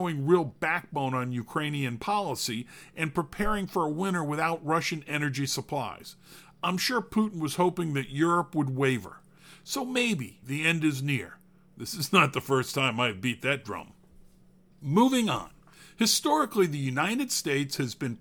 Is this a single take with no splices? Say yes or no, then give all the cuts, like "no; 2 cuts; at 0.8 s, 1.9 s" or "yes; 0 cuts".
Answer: no; 1 cut; at 10.4 s